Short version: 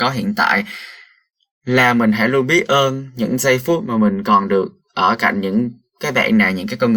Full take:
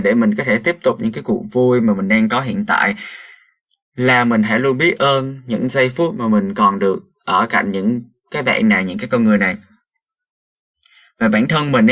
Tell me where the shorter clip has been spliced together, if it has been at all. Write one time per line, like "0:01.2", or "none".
none